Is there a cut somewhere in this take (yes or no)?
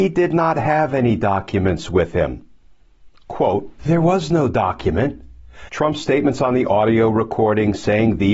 yes